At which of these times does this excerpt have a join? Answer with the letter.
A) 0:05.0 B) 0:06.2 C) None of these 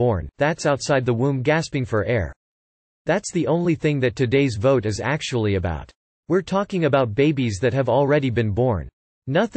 C